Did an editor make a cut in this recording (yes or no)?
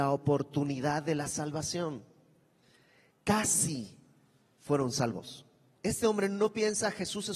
yes